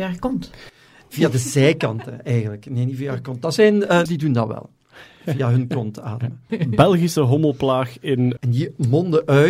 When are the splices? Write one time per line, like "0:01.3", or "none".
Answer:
0:04.1
0:06.5
0:08.4